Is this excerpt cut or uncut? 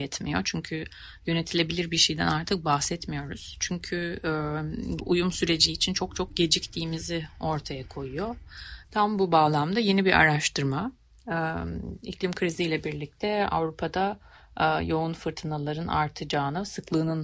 cut